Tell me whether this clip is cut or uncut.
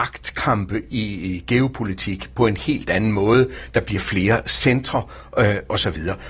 uncut